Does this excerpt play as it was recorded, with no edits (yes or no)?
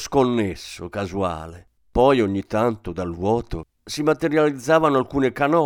no